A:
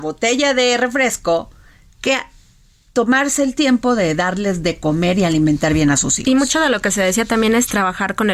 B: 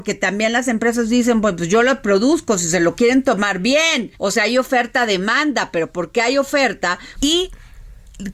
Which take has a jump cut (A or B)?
B